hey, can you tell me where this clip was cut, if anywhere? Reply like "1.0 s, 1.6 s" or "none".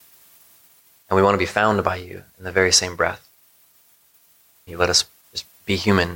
4.7 s